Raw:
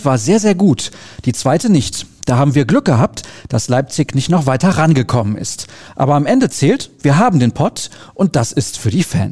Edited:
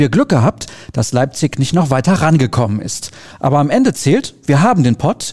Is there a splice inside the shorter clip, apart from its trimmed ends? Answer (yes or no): no